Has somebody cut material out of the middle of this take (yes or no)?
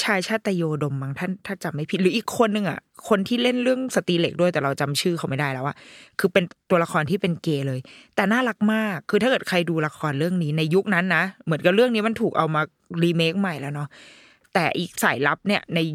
yes